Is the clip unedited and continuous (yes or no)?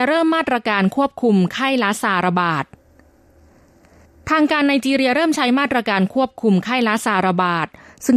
yes